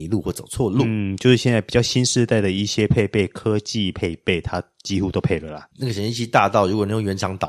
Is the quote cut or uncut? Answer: cut